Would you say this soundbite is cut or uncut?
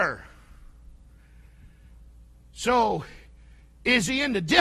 uncut